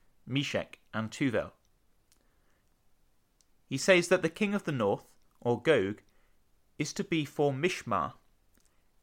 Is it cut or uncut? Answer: uncut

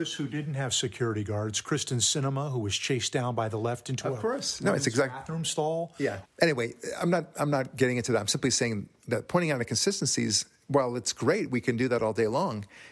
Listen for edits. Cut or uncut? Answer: cut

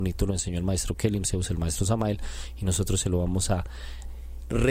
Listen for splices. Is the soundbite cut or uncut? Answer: uncut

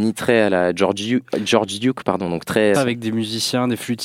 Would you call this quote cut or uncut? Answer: cut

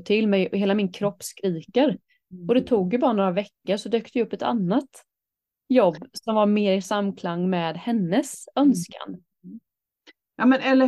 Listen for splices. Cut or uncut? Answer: uncut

